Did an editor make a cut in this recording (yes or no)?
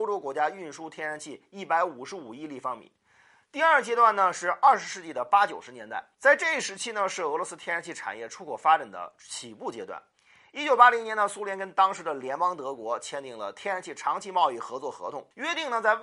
no